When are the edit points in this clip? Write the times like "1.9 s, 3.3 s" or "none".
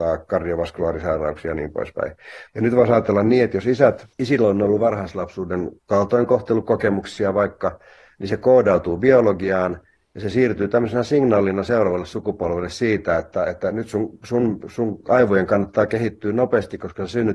2.5 s, 4.1 s, 5.8 s